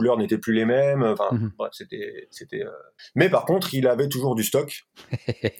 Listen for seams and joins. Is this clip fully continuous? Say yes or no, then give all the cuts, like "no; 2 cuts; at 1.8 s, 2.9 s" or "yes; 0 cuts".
yes; 0 cuts